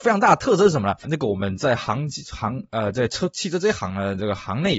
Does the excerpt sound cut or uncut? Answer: cut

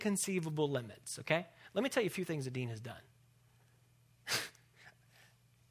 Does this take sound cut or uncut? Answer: uncut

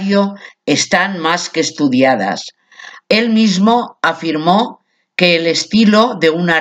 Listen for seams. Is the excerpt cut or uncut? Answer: cut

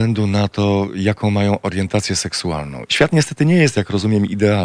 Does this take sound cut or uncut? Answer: cut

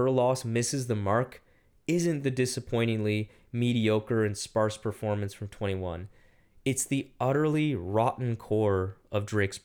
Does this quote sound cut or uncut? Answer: uncut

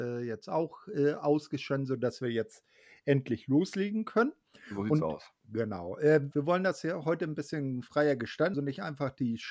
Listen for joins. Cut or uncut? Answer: cut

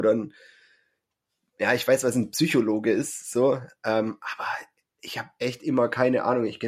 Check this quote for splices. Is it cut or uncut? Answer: uncut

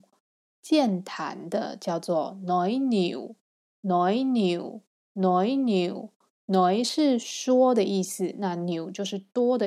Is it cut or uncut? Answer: uncut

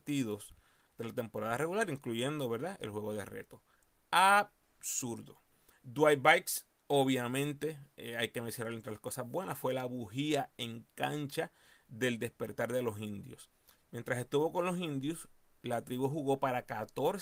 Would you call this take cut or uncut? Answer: cut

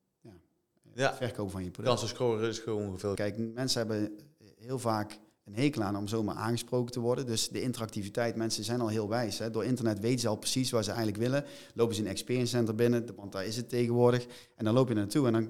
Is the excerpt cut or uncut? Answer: cut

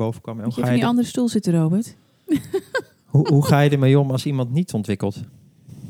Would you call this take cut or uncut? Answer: uncut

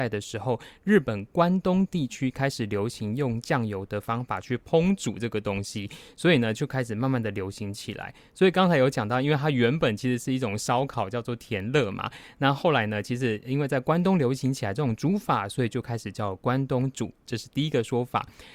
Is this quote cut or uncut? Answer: uncut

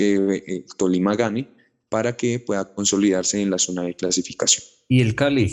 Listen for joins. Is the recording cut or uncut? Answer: uncut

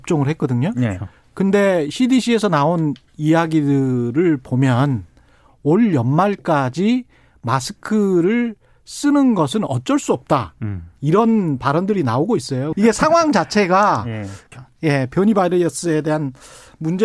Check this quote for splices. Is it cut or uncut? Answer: cut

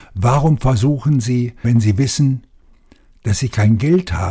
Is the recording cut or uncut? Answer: cut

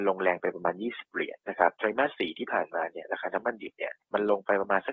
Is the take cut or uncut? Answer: cut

